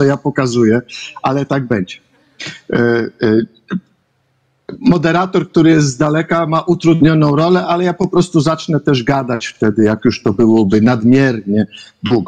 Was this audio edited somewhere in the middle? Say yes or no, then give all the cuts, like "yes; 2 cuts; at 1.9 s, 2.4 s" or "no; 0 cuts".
no; 0 cuts